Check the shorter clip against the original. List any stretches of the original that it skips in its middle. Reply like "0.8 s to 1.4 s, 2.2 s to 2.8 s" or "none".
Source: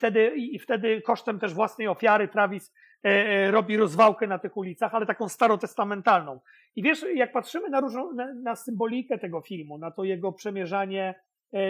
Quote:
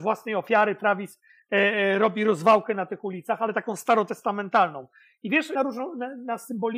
7.1 s to 7.7 s